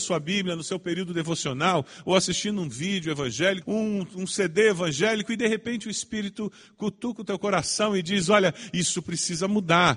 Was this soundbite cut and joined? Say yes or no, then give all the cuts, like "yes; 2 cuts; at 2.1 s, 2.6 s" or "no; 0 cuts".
no; 0 cuts